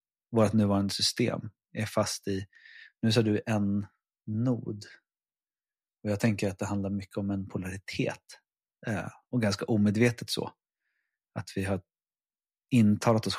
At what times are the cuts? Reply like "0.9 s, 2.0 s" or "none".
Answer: none